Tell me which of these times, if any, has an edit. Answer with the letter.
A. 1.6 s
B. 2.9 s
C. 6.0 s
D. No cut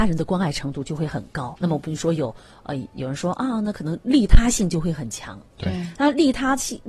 A